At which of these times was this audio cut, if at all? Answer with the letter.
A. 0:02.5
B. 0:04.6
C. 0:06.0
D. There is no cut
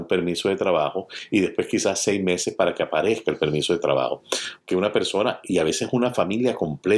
B